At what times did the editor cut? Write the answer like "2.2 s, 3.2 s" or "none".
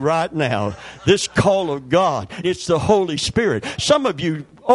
2.4 s